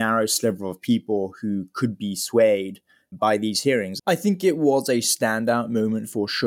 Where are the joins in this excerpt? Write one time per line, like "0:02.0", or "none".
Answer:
0:04.0